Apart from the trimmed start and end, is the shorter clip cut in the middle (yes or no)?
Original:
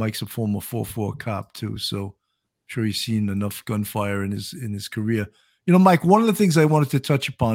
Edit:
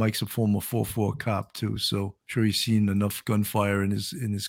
yes